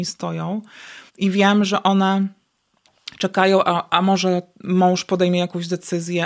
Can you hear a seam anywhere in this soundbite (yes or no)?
yes